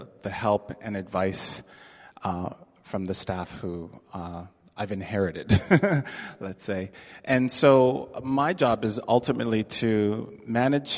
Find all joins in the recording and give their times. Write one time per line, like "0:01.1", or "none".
none